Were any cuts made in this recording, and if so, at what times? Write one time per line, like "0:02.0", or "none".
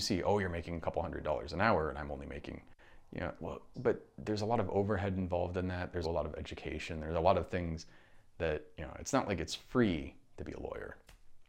0:03.7
0:06.0